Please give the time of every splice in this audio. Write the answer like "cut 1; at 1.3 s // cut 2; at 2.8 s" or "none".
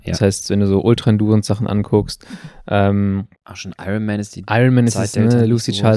cut 1; at 3.3 s